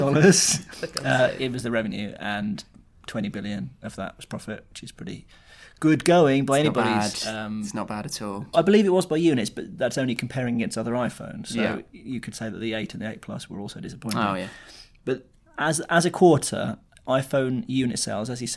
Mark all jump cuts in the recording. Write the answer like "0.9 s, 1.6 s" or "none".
8.5 s, 16.9 s